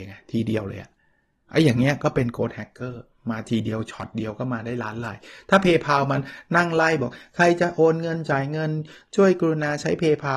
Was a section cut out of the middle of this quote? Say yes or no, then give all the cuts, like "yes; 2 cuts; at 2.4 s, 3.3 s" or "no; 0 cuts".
no; 0 cuts